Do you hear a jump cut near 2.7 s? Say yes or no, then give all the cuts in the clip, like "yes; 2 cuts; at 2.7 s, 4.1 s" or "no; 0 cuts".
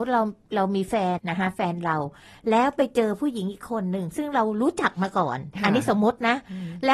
no; 1 cut; at 1.2 s